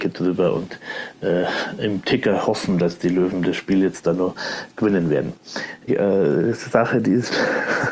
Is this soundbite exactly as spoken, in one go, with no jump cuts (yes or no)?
no